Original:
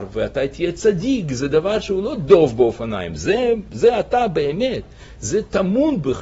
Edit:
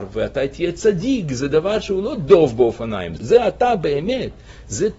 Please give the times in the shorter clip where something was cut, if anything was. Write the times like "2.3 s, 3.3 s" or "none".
3.2 s